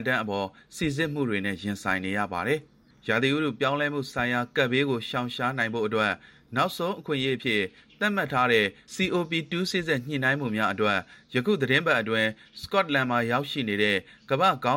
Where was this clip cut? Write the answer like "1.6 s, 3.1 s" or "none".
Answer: 9.7 s